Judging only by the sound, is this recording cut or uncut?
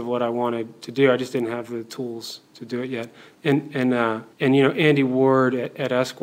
cut